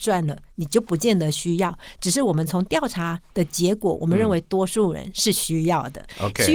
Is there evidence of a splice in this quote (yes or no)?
no